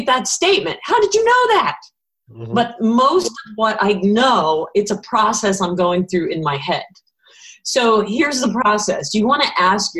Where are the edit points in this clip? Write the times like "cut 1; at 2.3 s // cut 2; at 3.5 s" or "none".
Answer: none

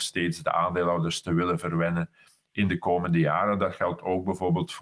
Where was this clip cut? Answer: none

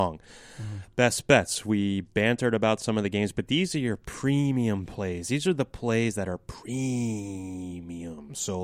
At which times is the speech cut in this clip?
none

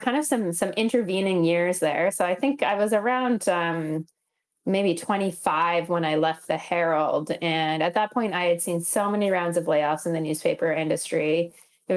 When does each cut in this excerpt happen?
none

